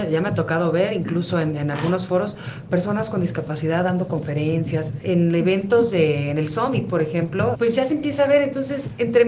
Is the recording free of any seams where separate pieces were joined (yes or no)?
no